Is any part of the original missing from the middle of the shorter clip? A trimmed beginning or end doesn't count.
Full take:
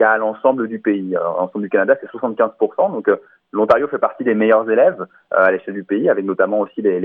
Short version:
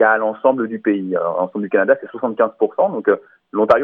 no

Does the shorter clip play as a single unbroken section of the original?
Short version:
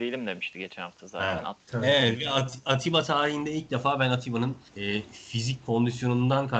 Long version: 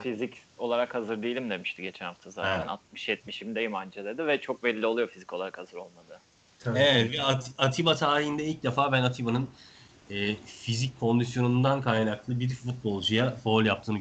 no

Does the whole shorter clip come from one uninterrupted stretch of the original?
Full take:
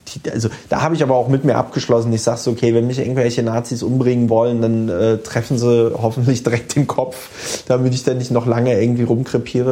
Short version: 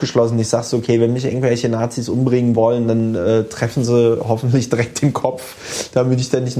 yes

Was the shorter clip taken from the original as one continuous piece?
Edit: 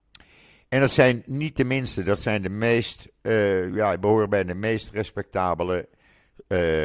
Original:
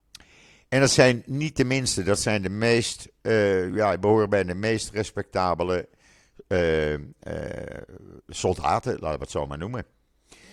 yes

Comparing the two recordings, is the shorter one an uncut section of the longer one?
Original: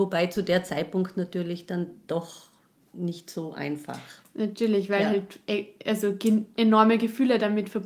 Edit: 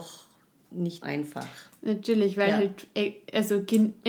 no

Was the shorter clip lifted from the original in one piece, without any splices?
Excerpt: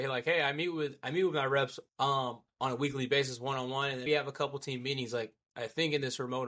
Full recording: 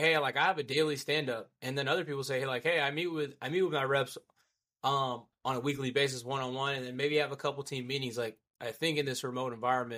no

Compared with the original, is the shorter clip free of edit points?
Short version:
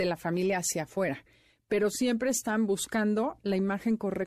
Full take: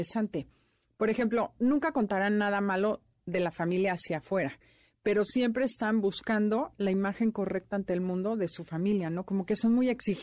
yes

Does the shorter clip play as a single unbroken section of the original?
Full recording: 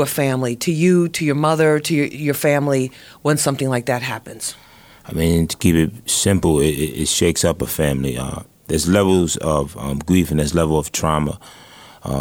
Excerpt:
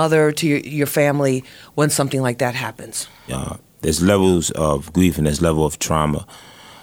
no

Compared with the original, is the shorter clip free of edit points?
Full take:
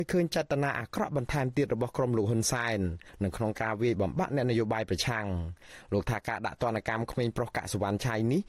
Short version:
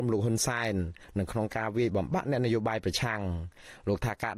yes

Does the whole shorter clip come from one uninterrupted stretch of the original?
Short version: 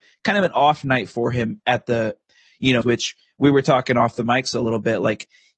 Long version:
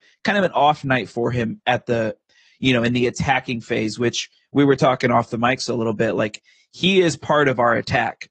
no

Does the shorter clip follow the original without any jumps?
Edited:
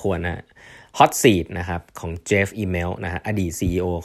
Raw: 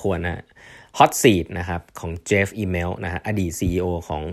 yes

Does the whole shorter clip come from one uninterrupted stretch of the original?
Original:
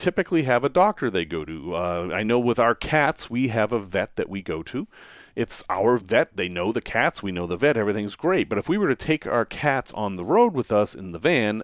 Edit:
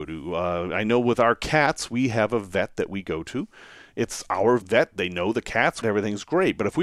no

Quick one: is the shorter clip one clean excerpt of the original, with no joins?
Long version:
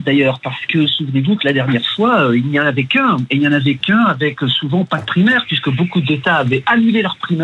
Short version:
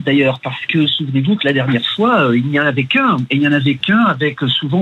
yes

